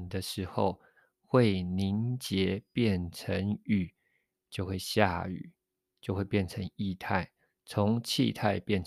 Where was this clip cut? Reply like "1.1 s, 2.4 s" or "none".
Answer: none